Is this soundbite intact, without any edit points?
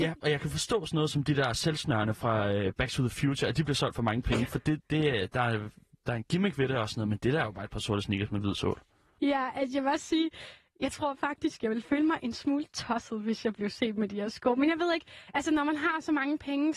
no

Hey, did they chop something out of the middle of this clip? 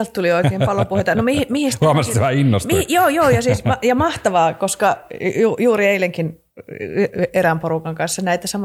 no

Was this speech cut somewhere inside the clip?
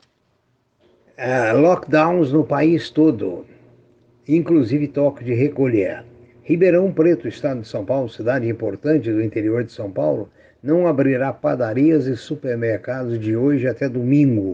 no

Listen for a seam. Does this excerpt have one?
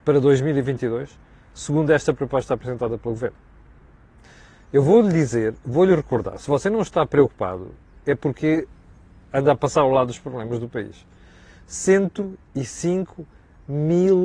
no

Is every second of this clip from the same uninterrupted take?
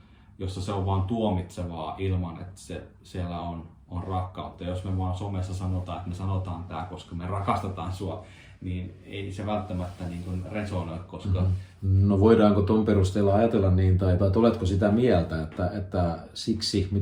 no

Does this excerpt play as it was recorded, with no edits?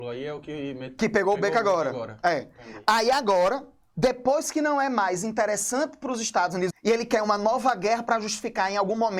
no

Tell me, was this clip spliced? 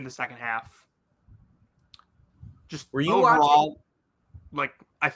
no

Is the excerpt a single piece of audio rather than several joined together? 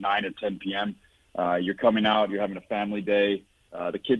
yes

